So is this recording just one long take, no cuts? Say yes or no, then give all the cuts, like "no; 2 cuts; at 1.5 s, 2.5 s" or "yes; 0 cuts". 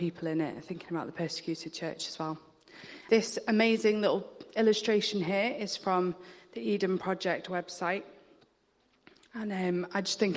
no; 1 cut; at 3.1 s